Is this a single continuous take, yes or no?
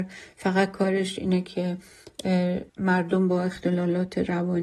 no